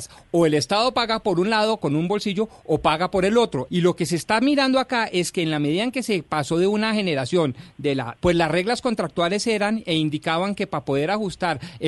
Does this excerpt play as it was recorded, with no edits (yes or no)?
no